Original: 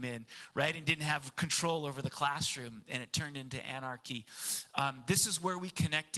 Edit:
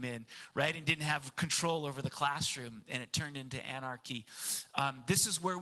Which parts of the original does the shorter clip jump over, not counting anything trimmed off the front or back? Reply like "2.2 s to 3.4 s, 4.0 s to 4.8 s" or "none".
none